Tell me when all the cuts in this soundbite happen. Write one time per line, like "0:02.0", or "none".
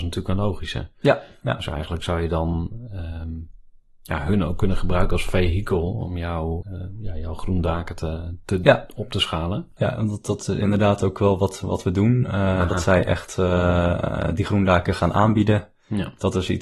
0:06.6
0:09.8